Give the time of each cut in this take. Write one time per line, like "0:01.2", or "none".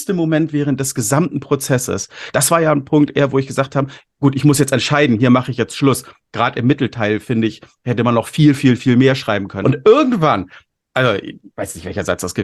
0:02.3
0:09.6